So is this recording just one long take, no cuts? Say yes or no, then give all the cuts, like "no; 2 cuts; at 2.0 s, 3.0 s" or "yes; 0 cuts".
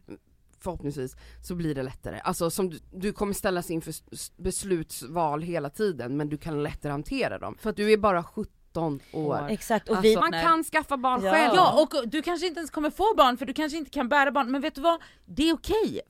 no; 2 cuts; at 2.8 s, 10.2 s